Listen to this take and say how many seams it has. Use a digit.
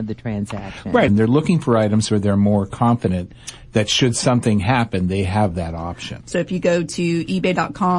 2